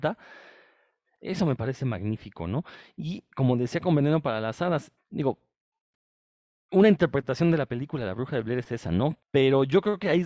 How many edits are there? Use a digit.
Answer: 3